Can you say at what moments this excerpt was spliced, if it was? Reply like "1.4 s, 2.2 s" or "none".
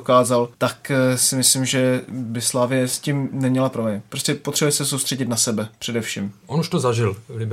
6.4 s